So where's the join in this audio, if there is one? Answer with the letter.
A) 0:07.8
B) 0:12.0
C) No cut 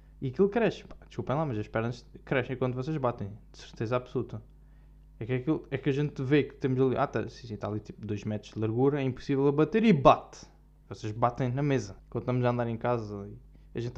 B